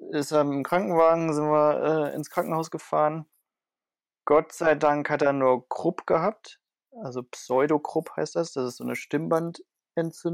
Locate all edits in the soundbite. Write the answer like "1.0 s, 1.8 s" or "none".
none